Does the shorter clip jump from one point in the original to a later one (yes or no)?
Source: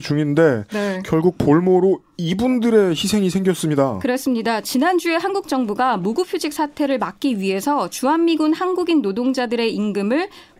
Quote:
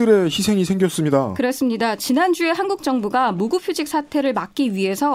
no